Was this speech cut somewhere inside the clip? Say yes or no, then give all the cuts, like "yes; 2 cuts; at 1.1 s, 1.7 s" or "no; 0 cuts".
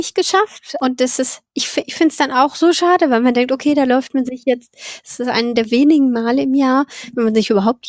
no; 0 cuts